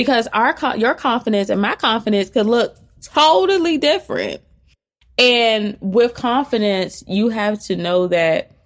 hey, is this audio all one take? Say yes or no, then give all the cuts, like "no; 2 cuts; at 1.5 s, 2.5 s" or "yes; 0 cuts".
yes; 0 cuts